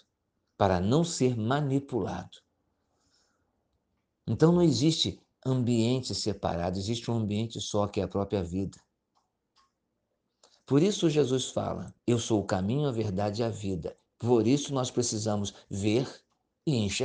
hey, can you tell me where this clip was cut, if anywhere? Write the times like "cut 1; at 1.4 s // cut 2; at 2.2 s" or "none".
cut 1; at 12.0 s // cut 2; at 14.1 s